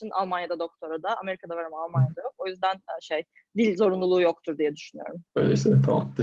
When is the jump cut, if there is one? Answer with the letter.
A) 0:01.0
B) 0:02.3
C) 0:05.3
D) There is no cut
C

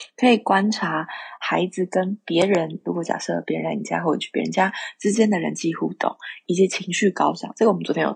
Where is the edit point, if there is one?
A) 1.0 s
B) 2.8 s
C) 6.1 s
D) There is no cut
D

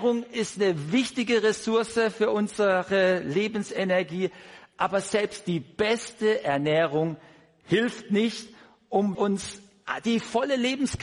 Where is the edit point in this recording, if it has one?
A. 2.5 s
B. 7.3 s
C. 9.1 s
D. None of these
C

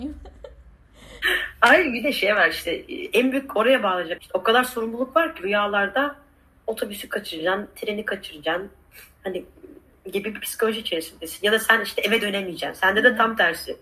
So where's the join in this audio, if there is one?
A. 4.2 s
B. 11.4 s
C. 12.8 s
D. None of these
A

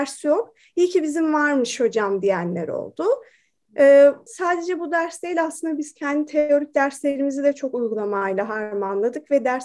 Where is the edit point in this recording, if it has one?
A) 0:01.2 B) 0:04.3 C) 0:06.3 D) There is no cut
B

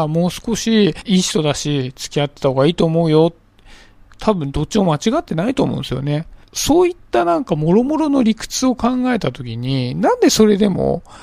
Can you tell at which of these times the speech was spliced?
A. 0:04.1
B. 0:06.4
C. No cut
C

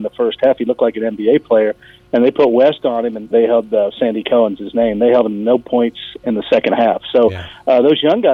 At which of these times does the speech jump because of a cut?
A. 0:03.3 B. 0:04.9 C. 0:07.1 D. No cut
A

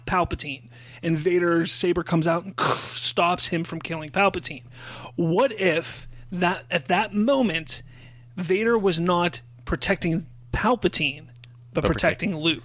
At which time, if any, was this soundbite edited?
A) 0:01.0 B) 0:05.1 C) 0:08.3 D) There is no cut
D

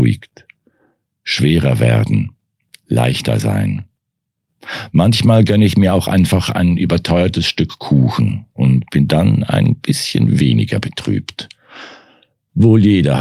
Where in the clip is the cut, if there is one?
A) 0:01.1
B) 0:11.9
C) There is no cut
C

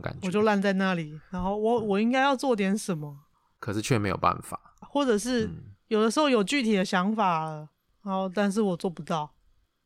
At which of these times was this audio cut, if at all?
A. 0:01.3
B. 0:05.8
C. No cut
C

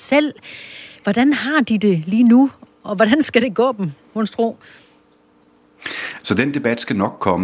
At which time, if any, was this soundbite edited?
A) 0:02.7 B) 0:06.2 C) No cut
B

